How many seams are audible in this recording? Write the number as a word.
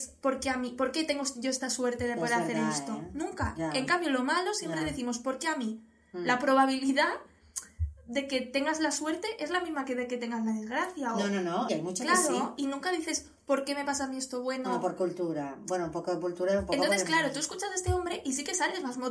one